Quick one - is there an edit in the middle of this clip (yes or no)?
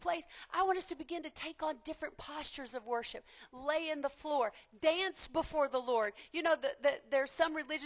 no